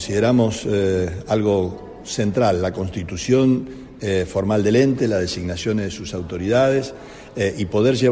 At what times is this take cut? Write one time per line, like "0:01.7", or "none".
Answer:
none